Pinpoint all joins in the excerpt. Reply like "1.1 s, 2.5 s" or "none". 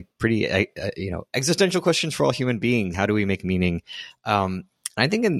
2.9 s